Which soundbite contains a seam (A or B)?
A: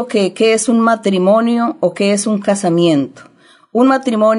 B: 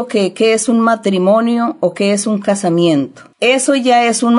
B